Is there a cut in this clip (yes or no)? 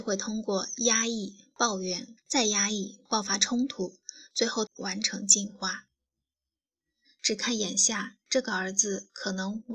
yes